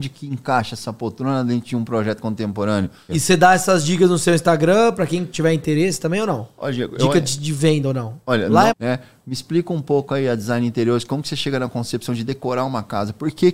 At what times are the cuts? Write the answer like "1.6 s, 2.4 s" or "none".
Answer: 3.1 s, 8.7 s